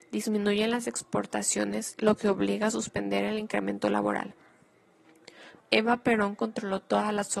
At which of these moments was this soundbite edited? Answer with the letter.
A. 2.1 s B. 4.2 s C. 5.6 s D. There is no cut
C